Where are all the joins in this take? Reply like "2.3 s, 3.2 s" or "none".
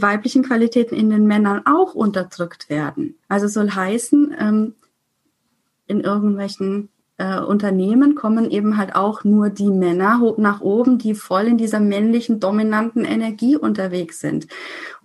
3.2 s